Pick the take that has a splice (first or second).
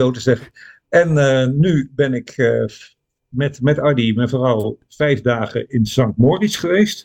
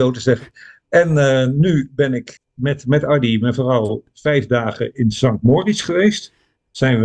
second